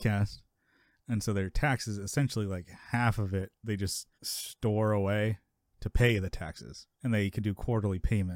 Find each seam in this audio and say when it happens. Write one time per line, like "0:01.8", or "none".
0:04.1
0:06.9